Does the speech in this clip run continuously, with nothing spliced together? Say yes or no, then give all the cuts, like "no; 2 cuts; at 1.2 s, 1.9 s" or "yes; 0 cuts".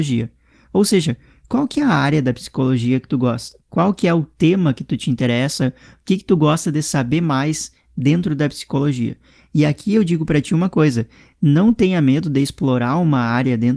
no; 1 cut; at 3.6 s